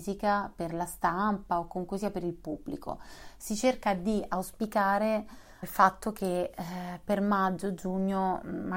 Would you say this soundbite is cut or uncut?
cut